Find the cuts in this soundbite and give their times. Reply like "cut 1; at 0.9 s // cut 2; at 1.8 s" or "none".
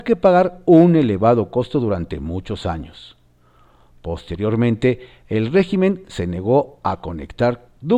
none